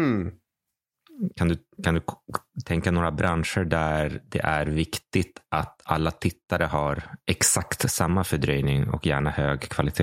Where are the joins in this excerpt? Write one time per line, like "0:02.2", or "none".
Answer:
0:01.8